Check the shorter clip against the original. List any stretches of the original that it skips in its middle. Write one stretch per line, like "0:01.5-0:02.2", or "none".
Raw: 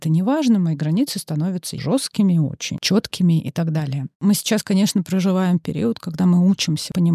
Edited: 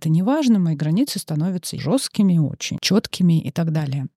none